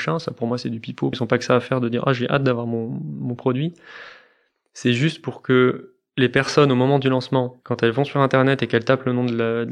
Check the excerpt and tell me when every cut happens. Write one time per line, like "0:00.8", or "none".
0:01.1